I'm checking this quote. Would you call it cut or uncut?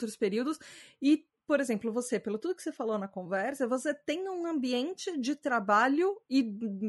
uncut